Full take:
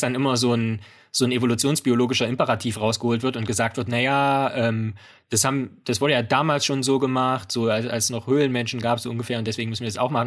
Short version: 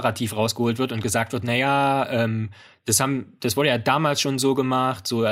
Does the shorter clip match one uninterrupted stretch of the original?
yes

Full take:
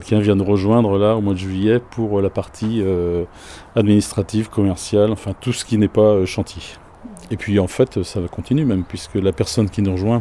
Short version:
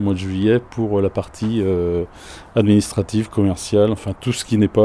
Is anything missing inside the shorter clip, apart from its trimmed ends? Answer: no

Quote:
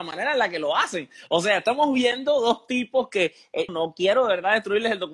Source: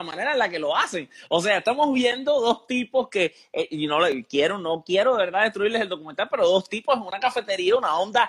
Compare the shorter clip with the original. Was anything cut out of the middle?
yes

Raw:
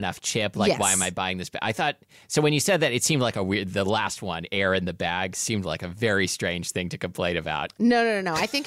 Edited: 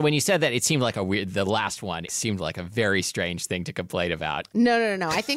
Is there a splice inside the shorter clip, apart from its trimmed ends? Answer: yes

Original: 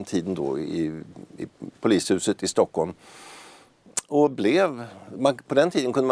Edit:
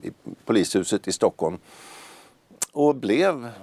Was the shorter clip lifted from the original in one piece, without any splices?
yes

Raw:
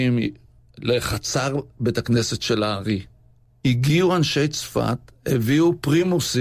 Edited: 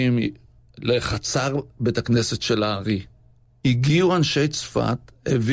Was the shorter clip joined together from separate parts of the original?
no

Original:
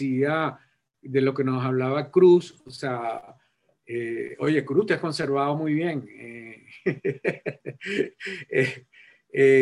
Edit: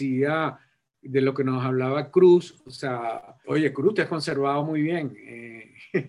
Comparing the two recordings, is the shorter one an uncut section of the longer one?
no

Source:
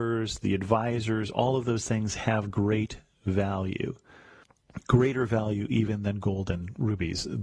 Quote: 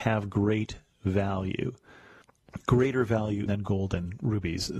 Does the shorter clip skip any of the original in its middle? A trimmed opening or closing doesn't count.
yes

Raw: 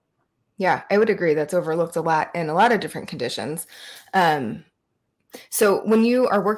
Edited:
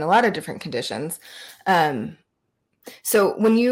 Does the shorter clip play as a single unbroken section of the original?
yes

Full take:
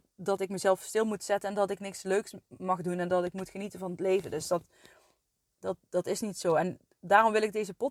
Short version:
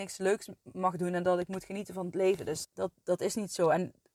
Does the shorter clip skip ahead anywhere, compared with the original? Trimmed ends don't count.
yes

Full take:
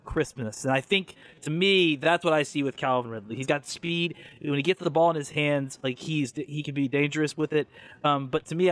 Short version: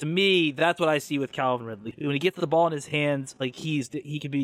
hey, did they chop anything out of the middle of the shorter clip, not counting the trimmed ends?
yes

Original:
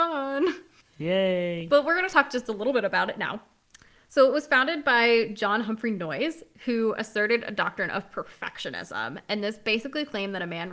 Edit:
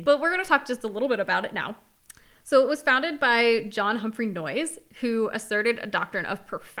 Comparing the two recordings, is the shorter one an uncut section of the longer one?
yes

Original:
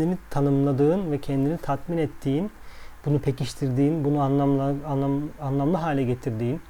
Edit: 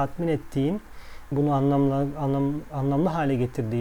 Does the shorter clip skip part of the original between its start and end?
yes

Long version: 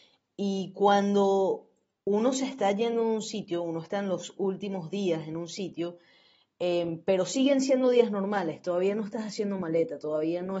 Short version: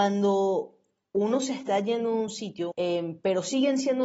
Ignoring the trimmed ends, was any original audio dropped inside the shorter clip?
yes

